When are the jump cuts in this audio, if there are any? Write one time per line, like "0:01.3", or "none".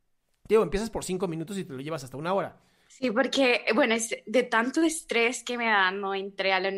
0:02.9